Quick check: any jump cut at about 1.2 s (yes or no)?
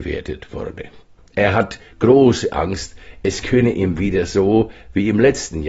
yes